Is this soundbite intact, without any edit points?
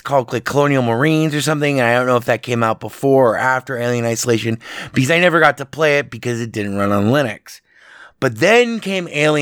yes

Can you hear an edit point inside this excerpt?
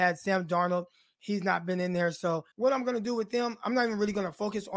yes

